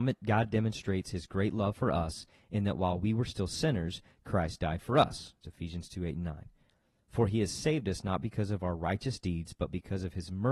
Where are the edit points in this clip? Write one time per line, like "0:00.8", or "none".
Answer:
0:05.4